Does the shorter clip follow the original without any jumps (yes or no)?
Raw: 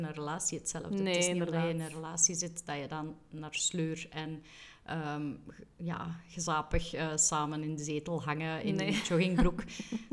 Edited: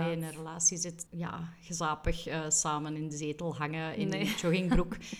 no